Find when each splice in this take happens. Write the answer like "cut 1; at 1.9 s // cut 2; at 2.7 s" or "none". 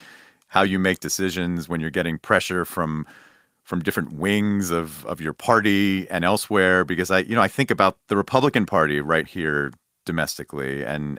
cut 1; at 8.0 s // cut 2; at 9.2 s